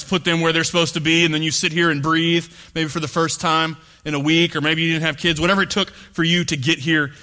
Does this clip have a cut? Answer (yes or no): no